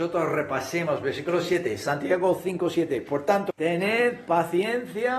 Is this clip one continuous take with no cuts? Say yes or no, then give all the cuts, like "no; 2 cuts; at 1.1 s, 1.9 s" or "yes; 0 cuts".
no; 1 cut; at 3.5 s